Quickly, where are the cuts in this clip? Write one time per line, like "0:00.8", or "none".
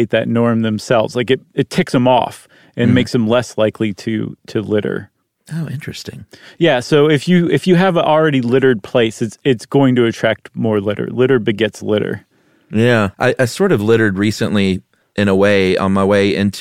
0:13.1